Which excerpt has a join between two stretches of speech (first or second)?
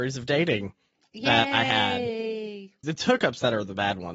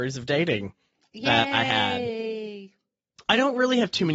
first